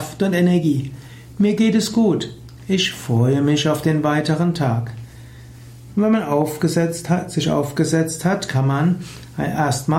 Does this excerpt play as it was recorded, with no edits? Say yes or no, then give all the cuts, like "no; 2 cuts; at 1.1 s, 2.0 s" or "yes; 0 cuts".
no; 1 cut; at 5.9 s